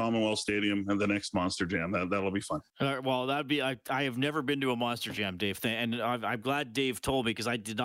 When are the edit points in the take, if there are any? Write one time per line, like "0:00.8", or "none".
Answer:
0:02.7